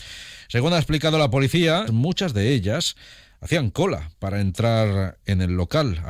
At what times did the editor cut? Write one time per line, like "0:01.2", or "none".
0:01.9